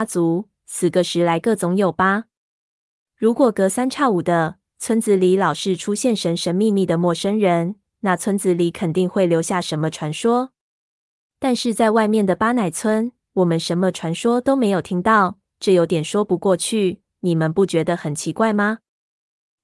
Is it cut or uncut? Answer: uncut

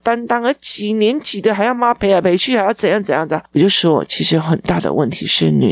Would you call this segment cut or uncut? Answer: cut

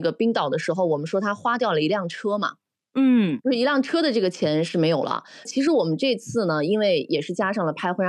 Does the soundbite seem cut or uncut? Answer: uncut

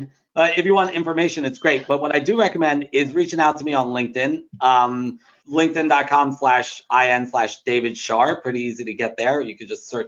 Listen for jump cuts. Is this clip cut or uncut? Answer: cut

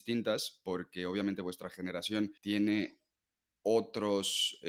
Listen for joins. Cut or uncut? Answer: cut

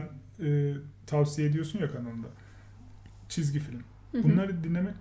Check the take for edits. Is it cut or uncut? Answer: uncut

